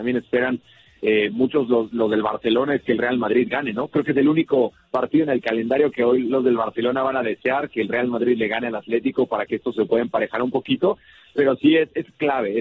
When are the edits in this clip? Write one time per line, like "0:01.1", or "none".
none